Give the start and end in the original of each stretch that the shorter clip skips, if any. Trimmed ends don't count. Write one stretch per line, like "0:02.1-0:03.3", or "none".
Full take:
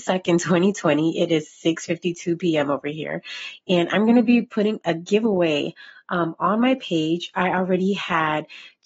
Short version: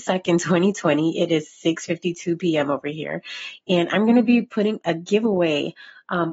none